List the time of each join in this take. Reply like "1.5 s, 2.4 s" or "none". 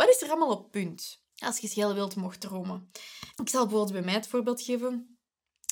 1.3 s, 3.3 s